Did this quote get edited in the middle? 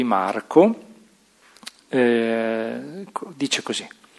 no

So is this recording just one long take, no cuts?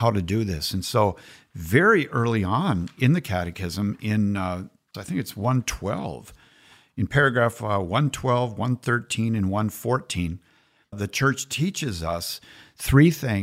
no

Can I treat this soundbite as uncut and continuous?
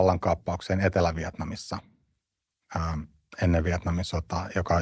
yes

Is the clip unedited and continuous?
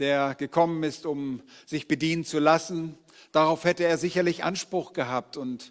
yes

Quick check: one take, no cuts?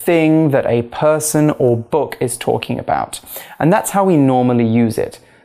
yes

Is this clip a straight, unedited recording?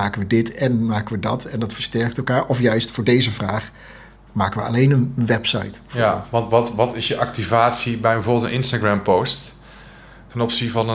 yes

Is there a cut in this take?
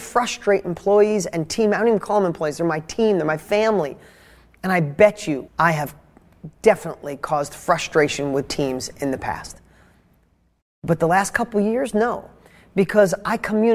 yes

